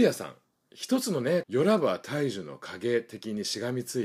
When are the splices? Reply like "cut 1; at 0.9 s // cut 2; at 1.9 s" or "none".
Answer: cut 1; at 1.4 s